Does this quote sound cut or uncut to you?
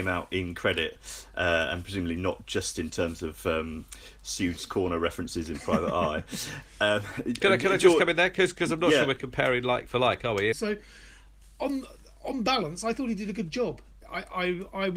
cut